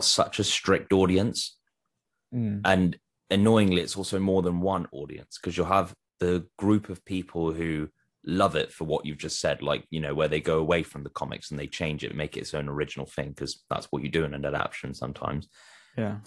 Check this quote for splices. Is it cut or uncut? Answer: uncut